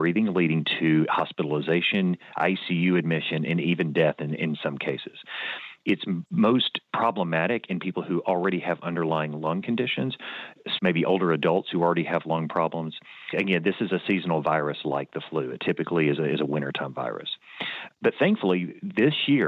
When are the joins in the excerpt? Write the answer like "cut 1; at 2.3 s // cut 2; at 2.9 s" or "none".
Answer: cut 1; at 10.8 s